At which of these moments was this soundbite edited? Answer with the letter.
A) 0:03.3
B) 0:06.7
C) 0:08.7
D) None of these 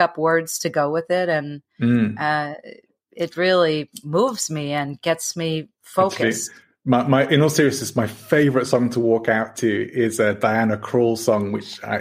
A